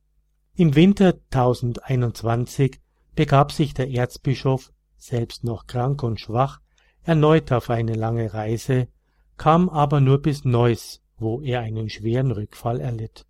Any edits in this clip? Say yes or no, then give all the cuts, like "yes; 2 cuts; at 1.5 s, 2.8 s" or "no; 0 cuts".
no; 0 cuts